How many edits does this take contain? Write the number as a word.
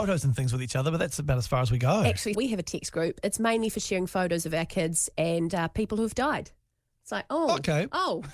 one